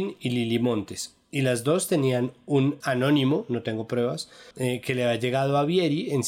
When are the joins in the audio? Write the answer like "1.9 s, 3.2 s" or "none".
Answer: 2.8 s, 4.5 s